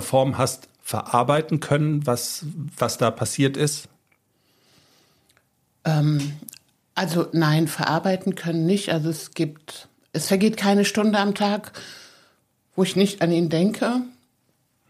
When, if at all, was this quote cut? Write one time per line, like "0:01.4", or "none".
none